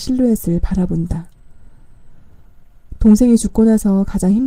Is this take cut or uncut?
uncut